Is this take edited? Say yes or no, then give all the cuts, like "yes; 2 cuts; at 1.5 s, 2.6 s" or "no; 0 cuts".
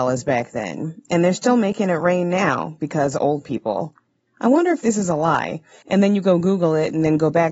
yes; 1 cut; at 4.3 s